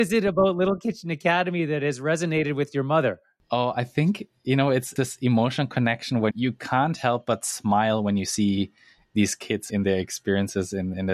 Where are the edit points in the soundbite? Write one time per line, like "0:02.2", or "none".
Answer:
0:06.3